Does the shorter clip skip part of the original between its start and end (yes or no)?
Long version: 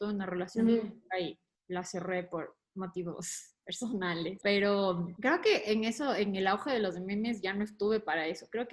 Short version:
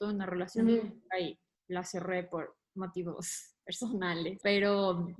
no